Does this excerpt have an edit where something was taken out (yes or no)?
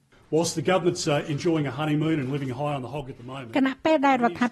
no